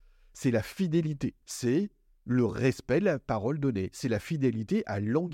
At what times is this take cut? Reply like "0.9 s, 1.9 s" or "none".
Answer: 1.4 s

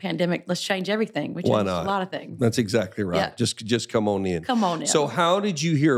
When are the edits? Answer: none

